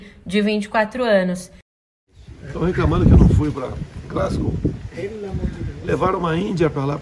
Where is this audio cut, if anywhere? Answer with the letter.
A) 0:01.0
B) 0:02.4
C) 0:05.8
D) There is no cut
D